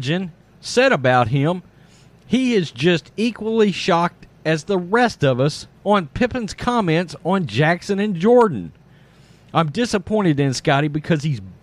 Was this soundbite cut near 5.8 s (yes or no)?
yes